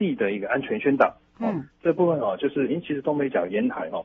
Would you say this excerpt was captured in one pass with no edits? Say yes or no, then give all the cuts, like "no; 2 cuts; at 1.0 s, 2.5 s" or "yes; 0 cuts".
yes; 0 cuts